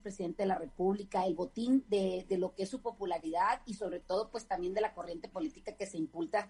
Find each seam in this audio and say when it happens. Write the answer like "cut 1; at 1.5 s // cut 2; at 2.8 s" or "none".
none